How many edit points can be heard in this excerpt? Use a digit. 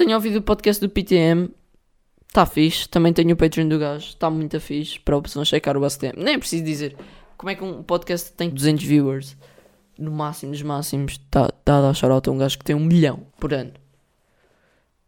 2